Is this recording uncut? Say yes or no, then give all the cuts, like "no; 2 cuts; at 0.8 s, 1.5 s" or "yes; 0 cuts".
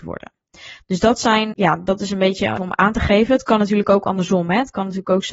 no; 2 cuts; at 1.5 s, 2.6 s